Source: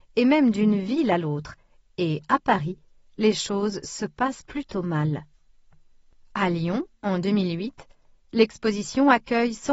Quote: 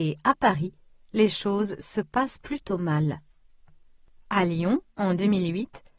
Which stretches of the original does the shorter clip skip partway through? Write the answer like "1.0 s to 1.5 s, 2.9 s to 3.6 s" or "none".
none